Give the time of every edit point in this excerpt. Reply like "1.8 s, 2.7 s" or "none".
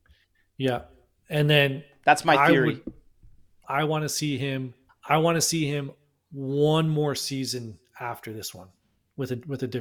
3.6 s, 4.9 s